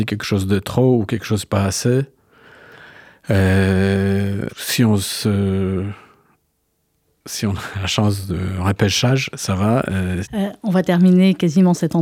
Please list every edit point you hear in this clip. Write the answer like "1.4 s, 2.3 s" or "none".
4.5 s, 10.2 s